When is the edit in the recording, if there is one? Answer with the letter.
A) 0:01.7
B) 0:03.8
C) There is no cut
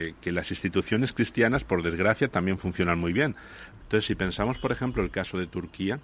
B